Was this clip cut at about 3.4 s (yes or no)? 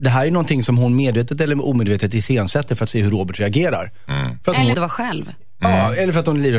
no